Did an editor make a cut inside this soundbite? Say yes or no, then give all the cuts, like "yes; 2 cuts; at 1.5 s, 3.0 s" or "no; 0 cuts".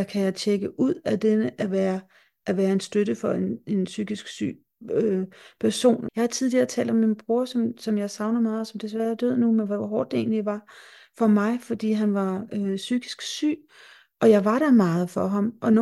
yes; 1 cut; at 6.1 s